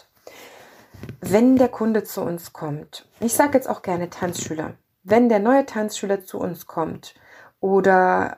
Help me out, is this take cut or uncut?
uncut